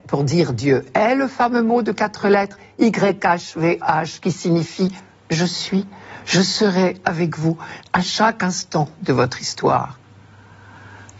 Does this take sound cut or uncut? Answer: uncut